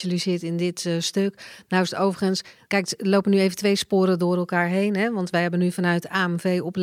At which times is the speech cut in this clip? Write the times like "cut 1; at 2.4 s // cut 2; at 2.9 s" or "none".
none